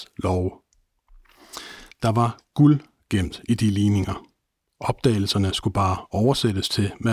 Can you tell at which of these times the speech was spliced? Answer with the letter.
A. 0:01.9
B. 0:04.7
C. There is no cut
A